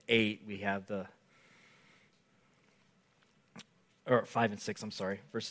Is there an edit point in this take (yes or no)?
no